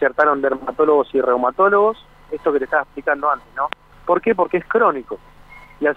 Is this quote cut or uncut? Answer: cut